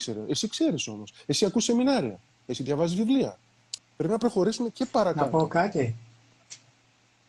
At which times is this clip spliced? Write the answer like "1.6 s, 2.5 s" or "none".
3.8 s